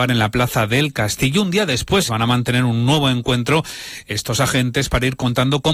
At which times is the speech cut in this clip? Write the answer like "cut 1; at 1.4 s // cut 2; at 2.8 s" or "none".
cut 1; at 2.1 s